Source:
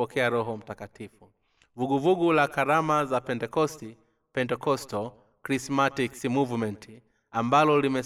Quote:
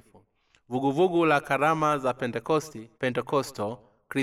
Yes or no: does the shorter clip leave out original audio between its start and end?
yes